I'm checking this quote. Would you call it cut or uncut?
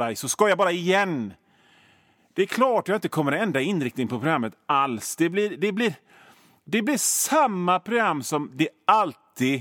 uncut